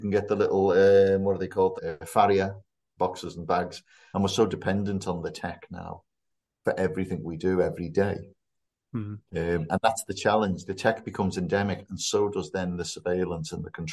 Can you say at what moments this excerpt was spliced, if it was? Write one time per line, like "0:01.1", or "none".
0:01.8
0:04.1